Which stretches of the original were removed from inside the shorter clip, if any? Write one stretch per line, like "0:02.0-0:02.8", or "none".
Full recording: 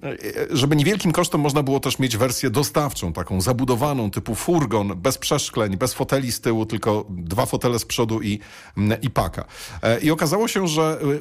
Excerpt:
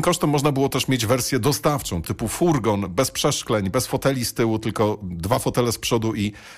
0:03.1-0:04.1